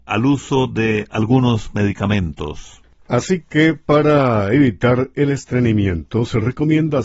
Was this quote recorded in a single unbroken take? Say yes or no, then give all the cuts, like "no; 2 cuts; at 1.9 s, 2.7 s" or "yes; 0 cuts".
yes; 0 cuts